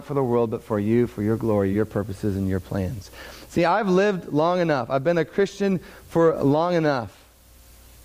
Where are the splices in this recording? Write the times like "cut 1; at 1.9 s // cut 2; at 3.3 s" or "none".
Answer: none